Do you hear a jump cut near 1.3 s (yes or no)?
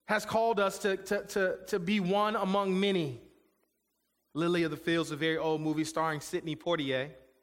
no